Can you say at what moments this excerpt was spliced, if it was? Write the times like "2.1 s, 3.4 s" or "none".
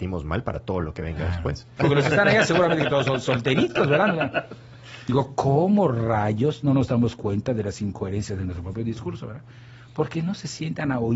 1.8 s